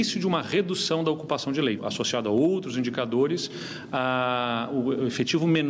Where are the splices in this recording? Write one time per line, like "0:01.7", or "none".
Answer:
0:01.8